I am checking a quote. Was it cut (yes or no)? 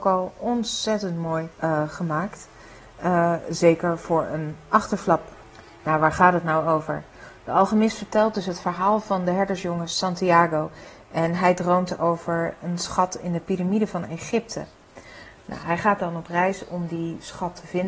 yes